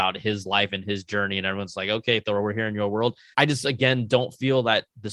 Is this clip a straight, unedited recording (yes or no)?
no